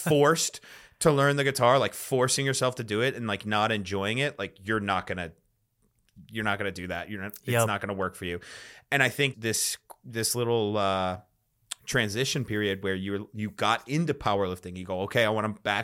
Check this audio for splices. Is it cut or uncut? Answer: cut